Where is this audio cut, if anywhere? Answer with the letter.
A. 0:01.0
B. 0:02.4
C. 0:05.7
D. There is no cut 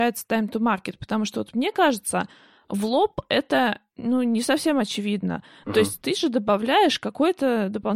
D